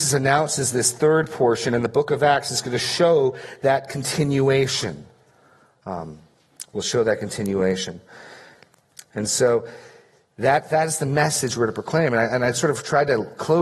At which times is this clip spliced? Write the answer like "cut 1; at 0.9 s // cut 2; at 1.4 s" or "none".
none